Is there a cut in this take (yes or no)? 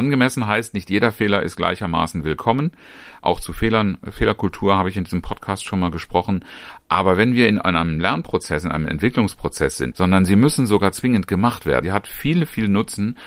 yes